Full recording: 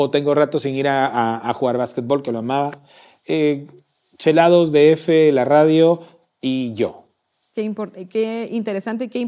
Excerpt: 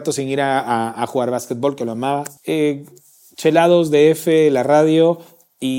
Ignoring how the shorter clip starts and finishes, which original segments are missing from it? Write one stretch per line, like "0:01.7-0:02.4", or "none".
0:02.8-0:03.2